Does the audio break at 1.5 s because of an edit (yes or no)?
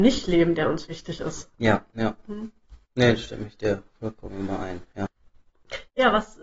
yes